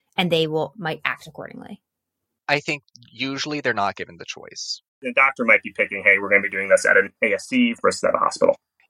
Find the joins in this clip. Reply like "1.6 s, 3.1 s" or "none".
4.9 s, 7.2 s